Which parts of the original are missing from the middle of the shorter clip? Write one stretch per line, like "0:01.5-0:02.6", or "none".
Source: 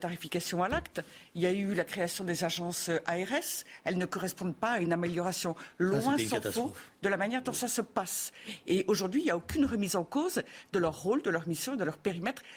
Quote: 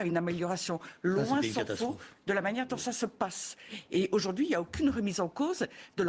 none